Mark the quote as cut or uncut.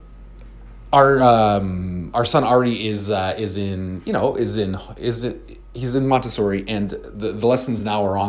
uncut